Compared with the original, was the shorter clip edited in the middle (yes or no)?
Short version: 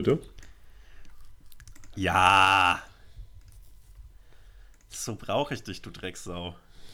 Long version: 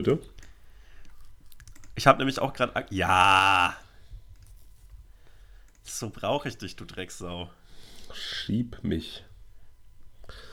yes